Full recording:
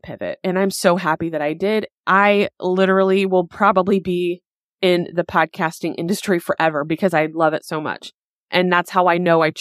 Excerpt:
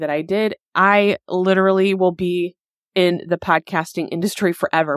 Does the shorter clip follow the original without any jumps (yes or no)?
no